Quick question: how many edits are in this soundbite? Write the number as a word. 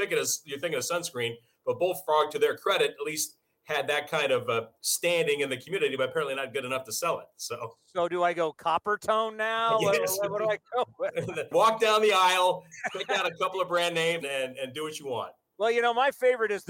two